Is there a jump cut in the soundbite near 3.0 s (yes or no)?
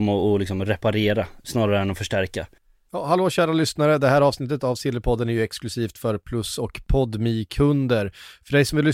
no